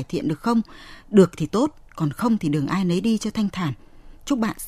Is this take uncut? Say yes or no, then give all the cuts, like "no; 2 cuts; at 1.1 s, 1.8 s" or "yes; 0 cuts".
yes; 0 cuts